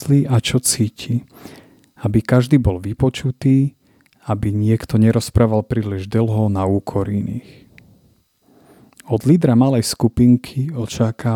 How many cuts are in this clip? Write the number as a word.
zero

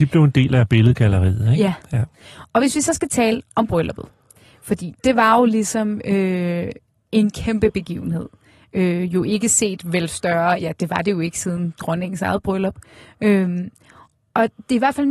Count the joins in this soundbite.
zero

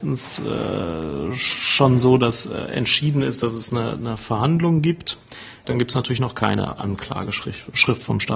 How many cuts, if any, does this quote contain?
one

